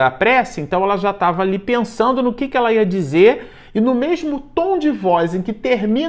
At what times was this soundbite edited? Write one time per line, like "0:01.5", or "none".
none